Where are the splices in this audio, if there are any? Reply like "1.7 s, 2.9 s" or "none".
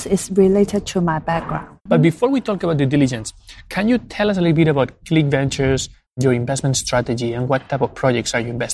1.9 s

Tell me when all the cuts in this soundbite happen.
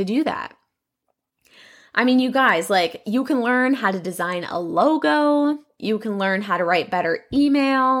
none

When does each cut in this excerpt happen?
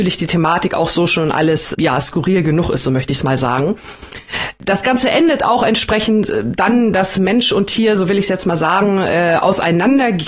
1.7 s

